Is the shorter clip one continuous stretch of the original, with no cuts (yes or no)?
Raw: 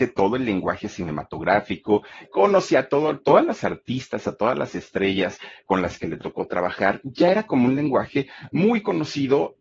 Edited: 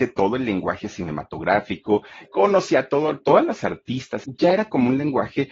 no